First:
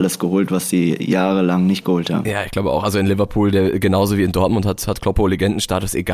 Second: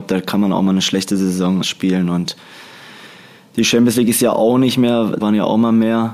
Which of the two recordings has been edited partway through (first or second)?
second